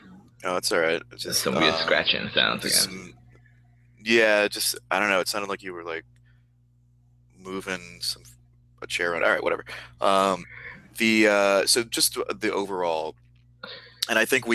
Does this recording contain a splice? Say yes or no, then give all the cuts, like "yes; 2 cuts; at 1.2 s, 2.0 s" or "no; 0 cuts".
no; 0 cuts